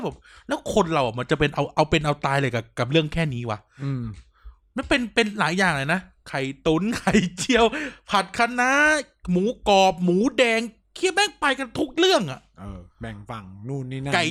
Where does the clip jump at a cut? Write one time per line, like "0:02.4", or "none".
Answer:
none